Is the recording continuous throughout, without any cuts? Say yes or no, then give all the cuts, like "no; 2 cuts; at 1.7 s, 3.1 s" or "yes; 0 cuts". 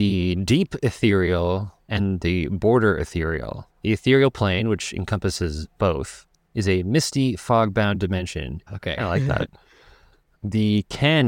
no; 2 cuts; at 8.7 s, 10.3 s